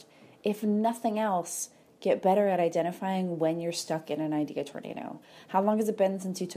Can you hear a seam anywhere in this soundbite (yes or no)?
no